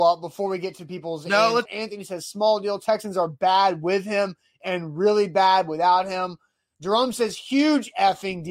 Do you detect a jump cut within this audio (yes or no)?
yes